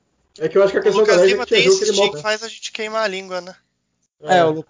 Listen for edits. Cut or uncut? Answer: cut